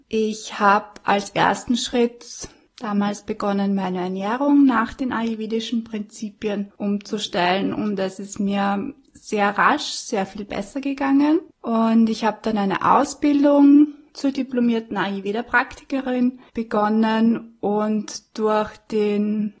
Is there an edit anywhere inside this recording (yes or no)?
yes